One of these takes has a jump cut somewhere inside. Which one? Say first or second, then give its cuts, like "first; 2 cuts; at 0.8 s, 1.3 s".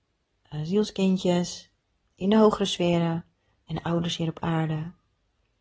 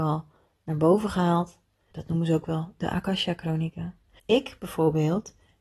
second; 2 cuts; at 1.9 s, 4.2 s